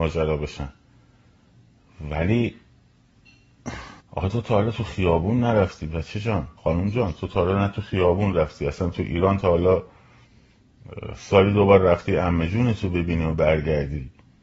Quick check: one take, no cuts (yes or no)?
no